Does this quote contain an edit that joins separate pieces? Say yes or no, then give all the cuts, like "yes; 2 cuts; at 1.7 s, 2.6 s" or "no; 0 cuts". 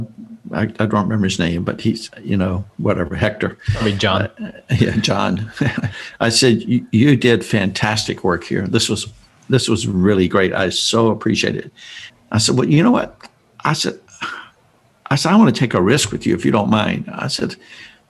yes; 1 cut; at 12.1 s